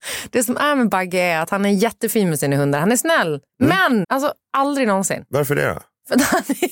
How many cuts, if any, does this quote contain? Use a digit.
1